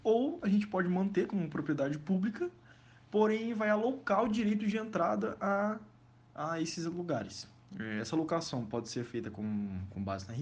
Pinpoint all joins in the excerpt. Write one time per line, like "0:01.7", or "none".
none